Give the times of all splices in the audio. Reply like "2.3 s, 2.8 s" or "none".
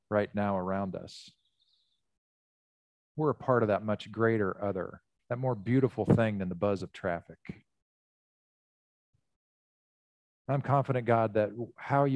5.2 s

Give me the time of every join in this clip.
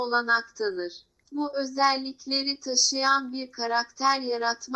1.2 s

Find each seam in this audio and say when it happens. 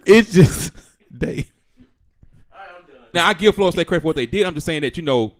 3.1 s

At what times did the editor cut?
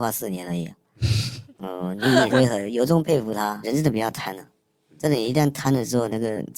2.3 s, 3.6 s

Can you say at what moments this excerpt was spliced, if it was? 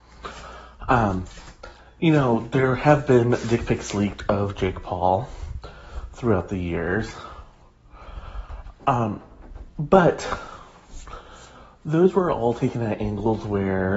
none

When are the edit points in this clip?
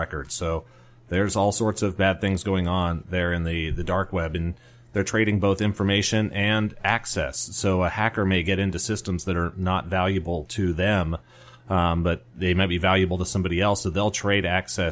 none

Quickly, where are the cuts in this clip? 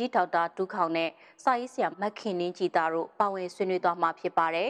1.9 s

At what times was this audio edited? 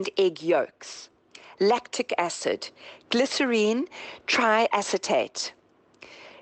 none

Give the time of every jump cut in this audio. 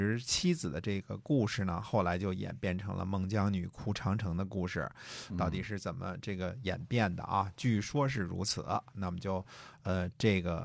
5.3 s

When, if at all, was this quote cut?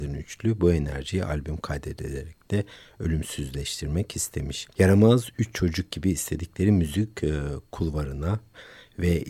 4.7 s

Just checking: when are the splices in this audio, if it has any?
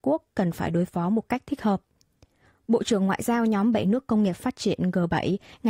none

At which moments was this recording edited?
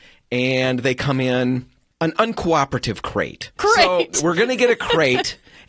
3.6 s

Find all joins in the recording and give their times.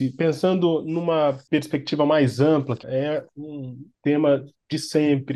2.8 s

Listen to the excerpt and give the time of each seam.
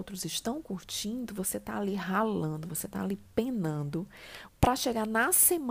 4.5 s

